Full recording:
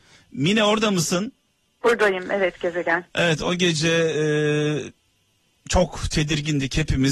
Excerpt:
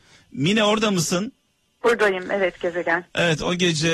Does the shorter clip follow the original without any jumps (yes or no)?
yes